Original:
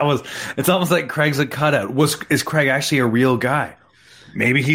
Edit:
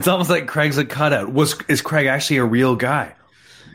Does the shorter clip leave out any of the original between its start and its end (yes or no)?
no